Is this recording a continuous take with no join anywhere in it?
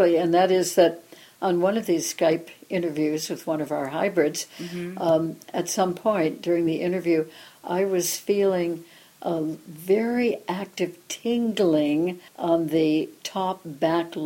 no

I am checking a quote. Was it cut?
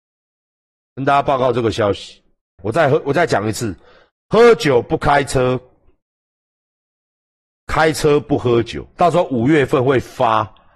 yes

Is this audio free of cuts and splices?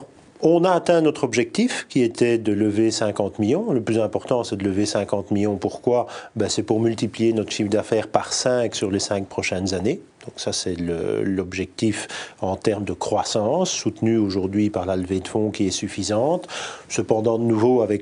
yes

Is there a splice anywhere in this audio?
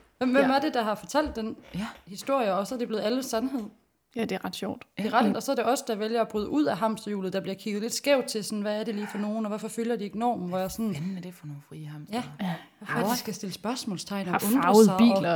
yes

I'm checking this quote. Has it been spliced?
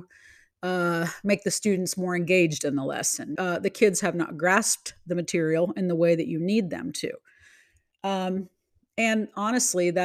yes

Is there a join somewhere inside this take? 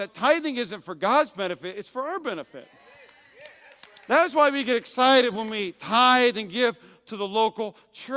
no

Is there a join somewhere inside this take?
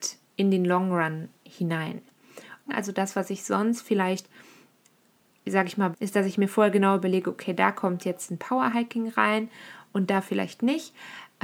yes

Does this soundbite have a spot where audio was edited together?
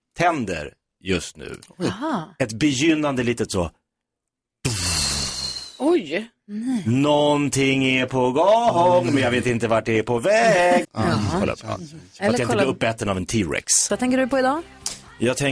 yes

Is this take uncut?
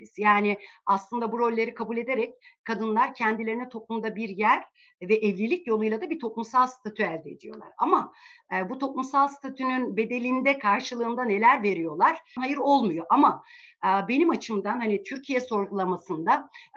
no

